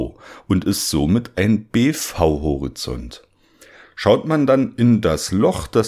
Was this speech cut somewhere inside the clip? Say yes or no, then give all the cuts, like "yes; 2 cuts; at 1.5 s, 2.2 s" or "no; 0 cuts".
yes; 1 cut; at 3.8 s